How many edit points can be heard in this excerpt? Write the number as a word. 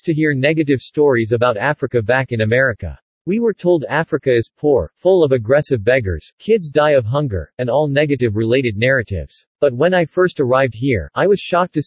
one